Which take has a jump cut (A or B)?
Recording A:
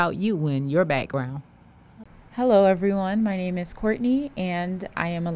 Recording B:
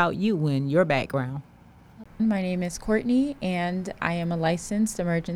B